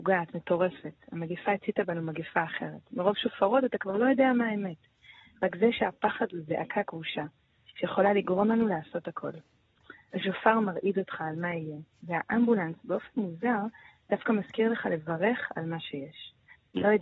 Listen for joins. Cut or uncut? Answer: cut